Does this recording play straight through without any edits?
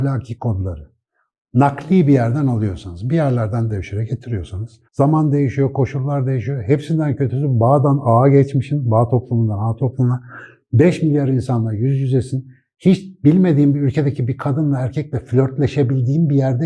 no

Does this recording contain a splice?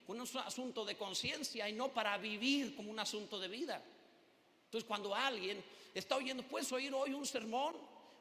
no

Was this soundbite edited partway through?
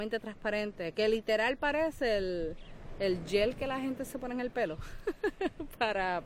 no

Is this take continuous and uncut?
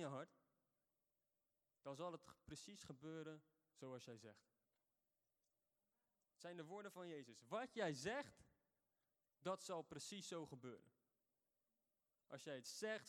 yes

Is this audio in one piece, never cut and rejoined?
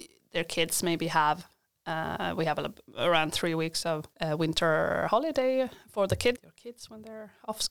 no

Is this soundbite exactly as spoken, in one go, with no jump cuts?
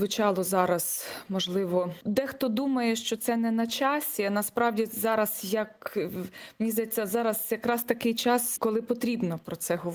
no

